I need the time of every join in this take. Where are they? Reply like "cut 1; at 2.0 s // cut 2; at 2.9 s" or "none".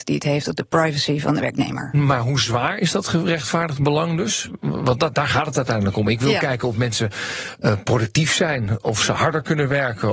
none